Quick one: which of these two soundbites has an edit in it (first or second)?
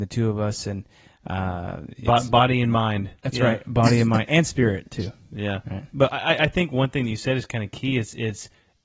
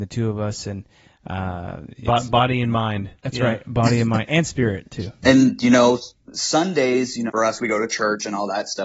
second